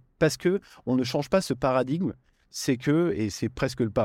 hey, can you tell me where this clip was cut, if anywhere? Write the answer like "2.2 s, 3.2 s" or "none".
none